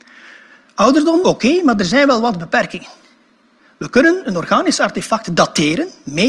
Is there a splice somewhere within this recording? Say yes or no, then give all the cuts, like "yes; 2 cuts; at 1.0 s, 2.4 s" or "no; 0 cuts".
yes; 1 cut; at 1.2 s